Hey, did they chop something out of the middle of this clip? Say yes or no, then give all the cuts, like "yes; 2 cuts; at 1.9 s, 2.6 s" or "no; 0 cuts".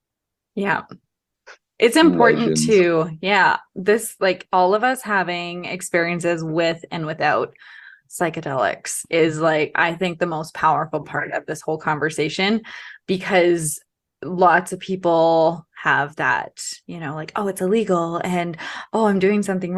no; 0 cuts